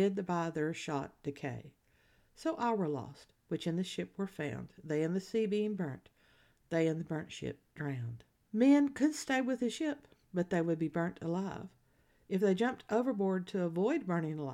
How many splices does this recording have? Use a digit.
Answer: 0